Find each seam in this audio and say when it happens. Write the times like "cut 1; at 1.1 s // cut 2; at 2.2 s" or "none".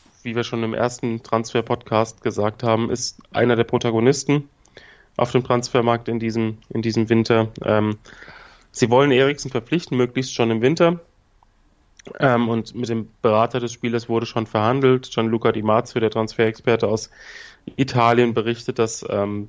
none